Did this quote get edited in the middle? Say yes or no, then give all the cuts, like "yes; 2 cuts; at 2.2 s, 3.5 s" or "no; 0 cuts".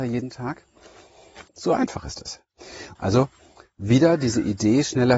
yes; 2 cuts; at 1.5 s, 3.0 s